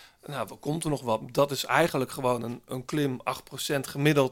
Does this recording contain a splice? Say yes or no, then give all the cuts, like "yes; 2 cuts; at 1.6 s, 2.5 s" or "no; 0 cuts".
no; 0 cuts